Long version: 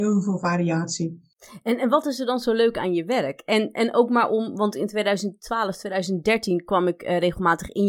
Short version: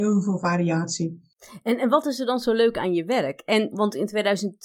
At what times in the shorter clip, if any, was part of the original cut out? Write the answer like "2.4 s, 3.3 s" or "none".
3.7 s

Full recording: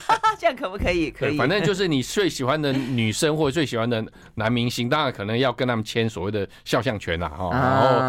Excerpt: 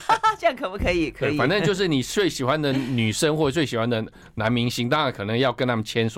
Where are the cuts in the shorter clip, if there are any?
none

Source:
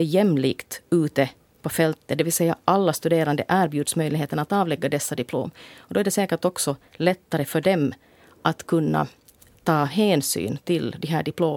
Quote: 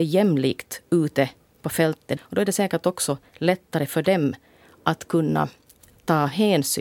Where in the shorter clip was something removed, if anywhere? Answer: 2.2 s

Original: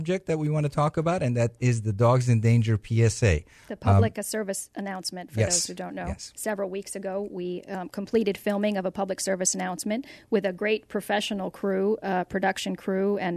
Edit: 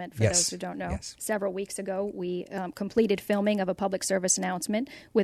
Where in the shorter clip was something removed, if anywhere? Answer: none

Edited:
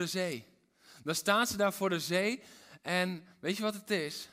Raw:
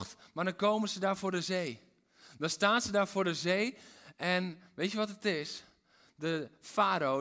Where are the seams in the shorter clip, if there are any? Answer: none

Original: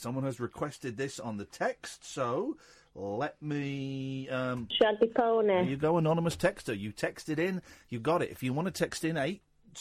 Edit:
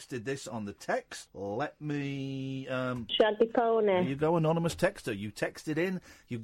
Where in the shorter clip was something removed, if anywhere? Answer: 1.3 s

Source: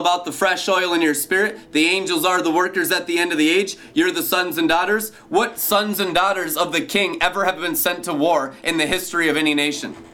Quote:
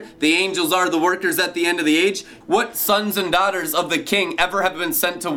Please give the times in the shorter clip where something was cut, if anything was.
2.4 s

